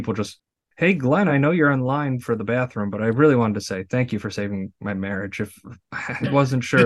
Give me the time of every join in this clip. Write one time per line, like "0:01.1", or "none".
none